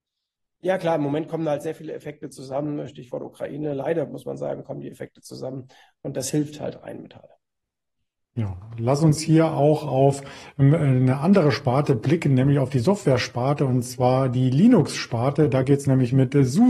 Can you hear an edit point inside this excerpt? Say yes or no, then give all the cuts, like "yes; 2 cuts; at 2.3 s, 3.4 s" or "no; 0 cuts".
no; 0 cuts